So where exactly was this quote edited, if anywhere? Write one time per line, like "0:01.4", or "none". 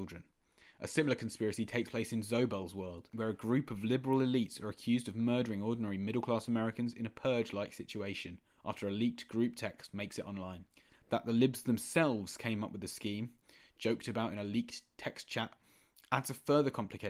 0:08.6
0:10.9